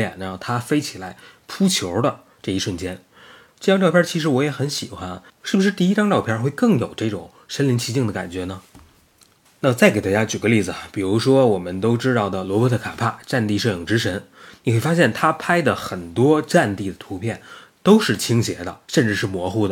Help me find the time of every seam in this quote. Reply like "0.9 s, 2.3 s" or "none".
5.3 s